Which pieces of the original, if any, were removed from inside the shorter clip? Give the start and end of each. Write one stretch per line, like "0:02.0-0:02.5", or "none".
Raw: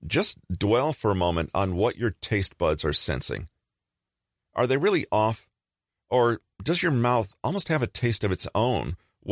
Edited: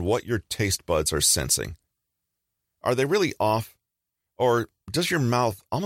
none